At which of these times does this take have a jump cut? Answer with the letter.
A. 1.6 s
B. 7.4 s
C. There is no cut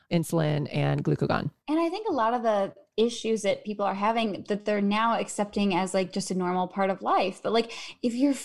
A